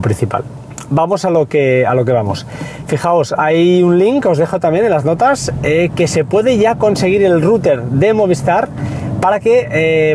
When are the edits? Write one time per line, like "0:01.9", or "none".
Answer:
none